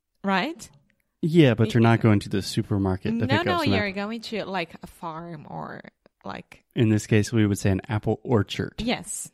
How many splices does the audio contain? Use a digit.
0